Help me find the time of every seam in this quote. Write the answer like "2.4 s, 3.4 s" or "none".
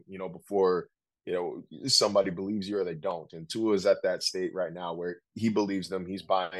5.3 s